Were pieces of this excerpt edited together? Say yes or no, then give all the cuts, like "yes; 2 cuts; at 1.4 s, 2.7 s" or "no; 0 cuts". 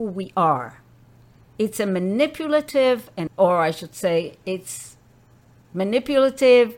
no; 0 cuts